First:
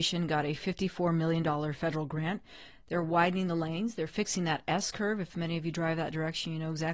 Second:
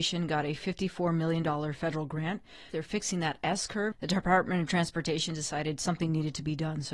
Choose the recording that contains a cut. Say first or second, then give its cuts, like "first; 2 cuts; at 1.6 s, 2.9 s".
second; 2 cuts; at 2.7 s, 3.9 s